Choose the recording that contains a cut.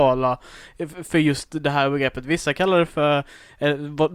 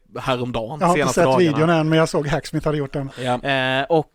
second; 1 cut; at 3.1 s

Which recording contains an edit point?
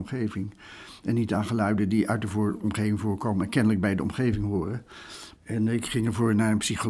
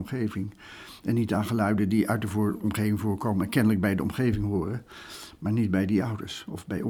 first; 1 cut; at 5.3 s

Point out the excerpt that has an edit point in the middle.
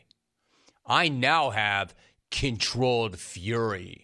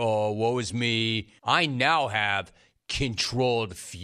second; 1 cut; at 1.4 s

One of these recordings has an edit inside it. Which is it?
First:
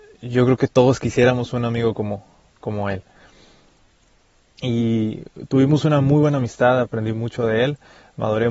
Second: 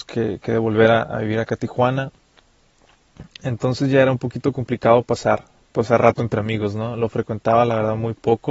first; 1 cut; at 4.6 s

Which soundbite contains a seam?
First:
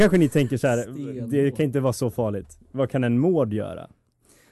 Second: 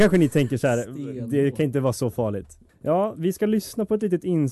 second; 1 cut; at 2.7 s

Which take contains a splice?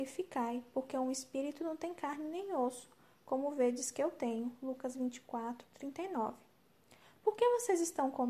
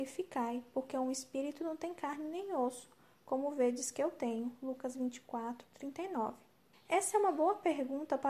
second; 1 cut; at 6.7 s

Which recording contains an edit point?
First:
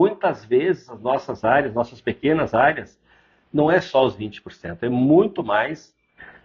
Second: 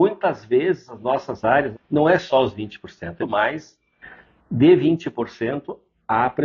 second; 2 cuts; at 1.7 s, 3.2 s

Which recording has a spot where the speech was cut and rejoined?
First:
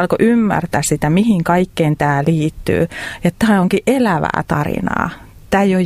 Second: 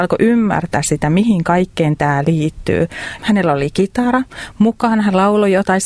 second; 1 cut; at 3.2 s

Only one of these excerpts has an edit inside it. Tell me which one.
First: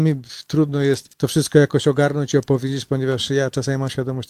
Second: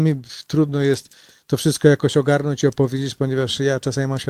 first; 1 cut; at 1.1 s

